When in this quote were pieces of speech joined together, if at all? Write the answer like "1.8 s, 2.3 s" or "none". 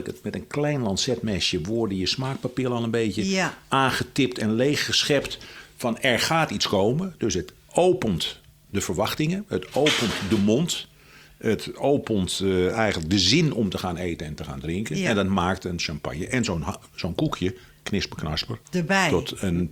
18.6 s